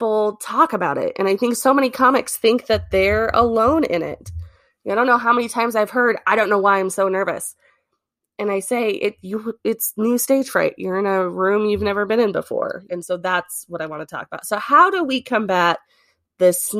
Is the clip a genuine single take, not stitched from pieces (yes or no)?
no